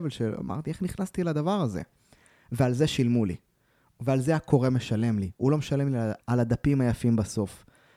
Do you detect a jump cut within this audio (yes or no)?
yes